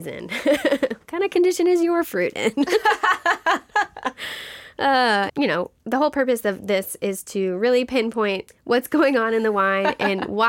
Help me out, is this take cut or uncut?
cut